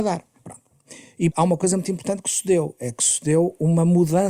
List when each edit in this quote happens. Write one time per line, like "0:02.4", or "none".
0:01.3